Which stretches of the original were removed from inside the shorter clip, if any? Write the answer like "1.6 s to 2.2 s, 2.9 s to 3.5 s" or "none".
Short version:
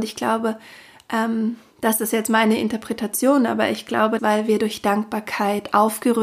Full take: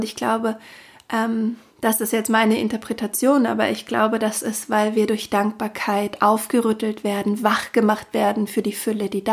4.2 s to 4.7 s